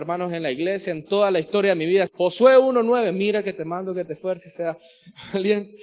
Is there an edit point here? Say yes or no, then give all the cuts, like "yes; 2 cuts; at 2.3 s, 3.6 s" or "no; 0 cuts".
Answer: yes; 1 cut; at 2.1 s